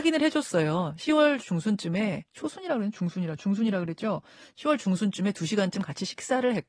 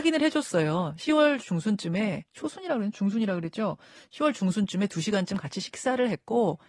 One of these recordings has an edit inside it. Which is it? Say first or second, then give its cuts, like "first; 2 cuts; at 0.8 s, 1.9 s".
second; 1 cut; at 2.9 s